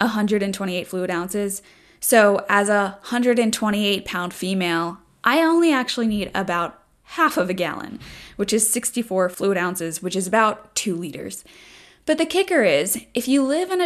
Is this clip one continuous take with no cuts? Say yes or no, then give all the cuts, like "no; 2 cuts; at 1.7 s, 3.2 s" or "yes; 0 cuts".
yes; 0 cuts